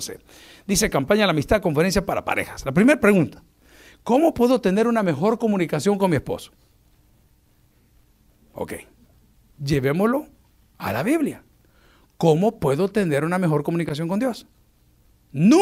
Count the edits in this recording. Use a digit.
0